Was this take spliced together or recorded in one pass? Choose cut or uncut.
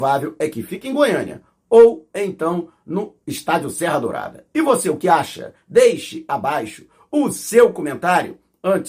cut